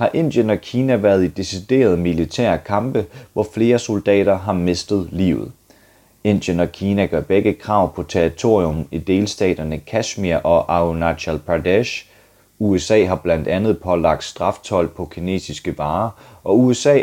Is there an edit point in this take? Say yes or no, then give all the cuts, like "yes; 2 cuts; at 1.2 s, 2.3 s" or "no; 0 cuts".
yes; 1 cut; at 12.4 s